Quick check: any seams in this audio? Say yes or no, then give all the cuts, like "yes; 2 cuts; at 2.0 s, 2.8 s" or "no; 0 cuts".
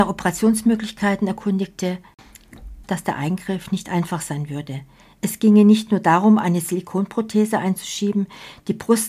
yes; 1 cut; at 2.8 s